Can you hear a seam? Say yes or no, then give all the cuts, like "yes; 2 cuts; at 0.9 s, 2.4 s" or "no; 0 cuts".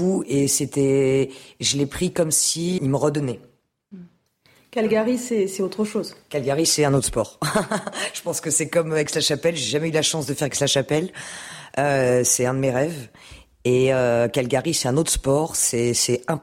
yes; 1 cut; at 2.8 s